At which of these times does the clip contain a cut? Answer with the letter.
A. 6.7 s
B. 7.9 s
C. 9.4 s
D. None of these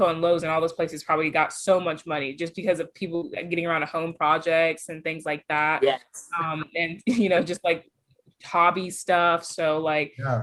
D